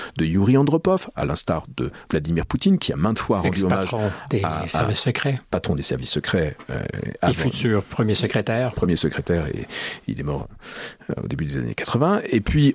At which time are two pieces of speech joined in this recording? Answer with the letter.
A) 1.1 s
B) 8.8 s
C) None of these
C